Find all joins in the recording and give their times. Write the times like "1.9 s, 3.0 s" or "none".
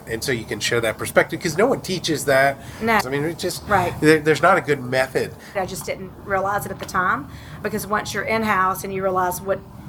3.0 s, 5.5 s